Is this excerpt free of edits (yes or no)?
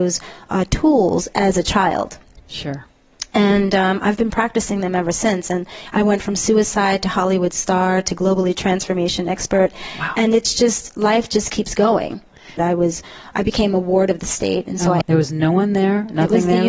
no